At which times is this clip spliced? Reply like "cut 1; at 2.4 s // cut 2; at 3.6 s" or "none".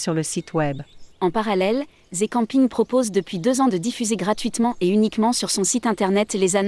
cut 1; at 1.1 s